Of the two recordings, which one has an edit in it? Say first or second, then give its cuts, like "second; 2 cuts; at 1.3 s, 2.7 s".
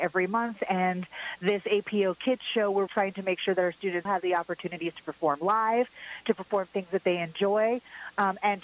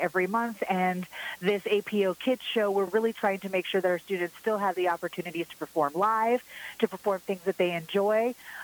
first; 2 cuts; at 2.9 s, 4.1 s